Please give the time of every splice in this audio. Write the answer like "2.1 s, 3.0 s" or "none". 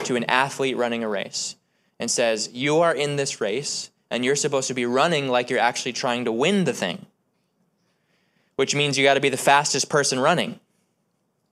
none